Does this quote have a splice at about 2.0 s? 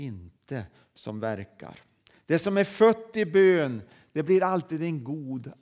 no; 0 cuts

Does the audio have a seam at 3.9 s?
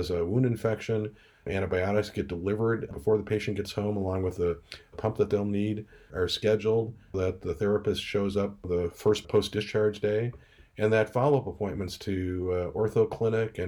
no; 3 cuts; at 1.5 s, 6.1 s, 7.1 s

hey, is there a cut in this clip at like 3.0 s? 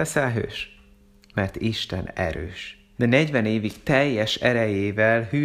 yes; 1 cut; at 3.0 s

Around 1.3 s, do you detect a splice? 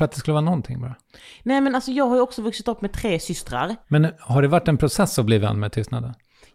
no; 1 cut; at 3.8 s

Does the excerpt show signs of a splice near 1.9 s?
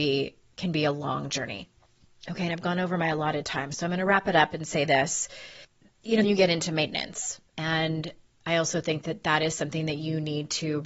no; 1 cut; at 6.2 s

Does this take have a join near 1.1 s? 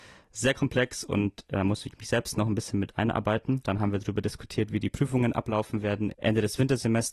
no; 1 cut; at 3.6 s

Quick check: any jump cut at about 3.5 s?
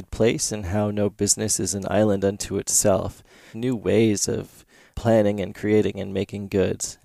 yes; 1 cut; at 3.5 s

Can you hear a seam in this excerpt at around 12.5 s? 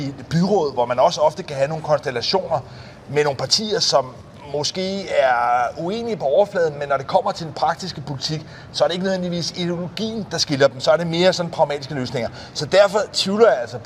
no; 0 cuts

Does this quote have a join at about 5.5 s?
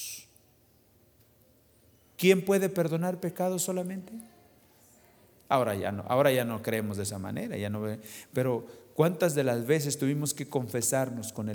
yes; 1 cut; at 5.5 s

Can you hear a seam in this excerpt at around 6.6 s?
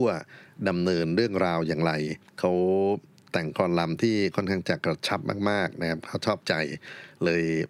no; 1 cut; at 2.3 s

